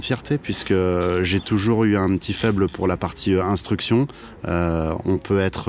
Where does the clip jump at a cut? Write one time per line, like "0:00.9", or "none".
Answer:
none